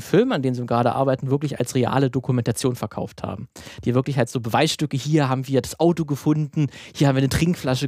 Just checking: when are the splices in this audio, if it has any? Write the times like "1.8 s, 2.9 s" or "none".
none